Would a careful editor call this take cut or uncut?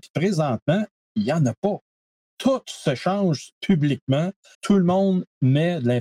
cut